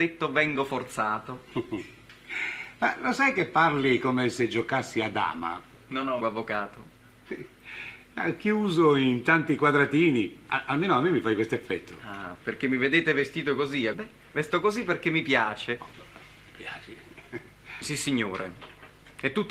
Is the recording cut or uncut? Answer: cut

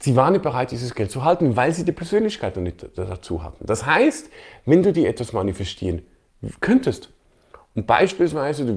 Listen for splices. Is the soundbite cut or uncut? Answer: uncut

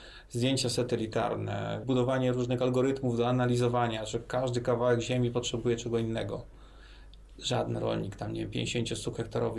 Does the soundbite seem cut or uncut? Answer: cut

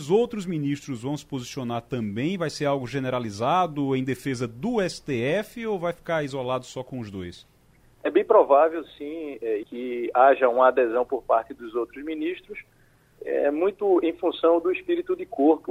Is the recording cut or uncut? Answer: cut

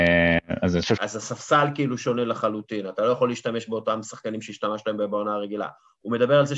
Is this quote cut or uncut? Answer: cut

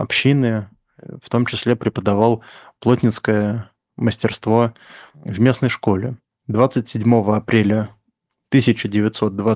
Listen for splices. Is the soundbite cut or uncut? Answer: cut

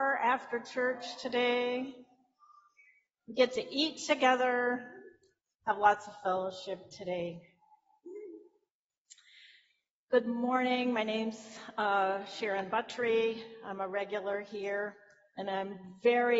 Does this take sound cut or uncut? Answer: uncut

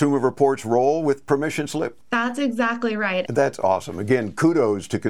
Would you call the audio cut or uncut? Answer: cut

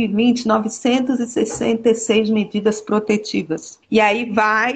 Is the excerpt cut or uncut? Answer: cut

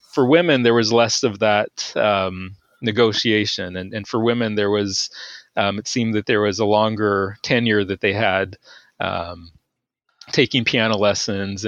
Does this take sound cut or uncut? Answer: uncut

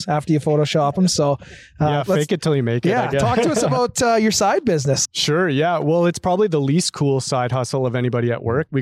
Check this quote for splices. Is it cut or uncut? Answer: cut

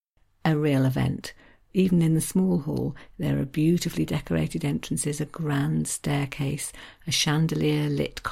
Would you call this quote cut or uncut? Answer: uncut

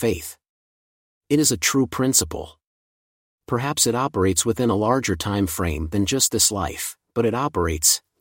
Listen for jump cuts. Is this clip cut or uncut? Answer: uncut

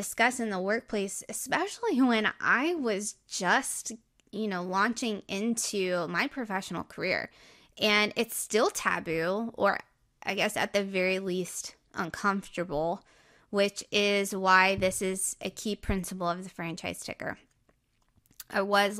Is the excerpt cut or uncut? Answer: uncut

